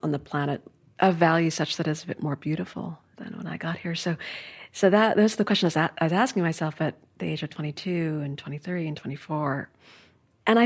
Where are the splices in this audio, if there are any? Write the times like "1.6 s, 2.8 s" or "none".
none